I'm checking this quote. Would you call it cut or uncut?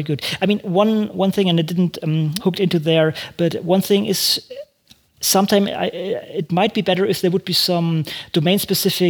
cut